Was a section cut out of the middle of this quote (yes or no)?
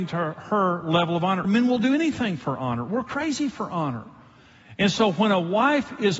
yes